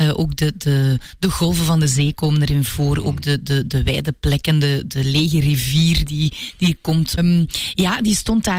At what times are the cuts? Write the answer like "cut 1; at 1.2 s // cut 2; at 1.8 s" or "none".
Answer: cut 1; at 7.2 s